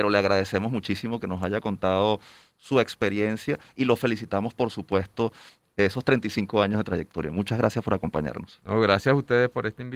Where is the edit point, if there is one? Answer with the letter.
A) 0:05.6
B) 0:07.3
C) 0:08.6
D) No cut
A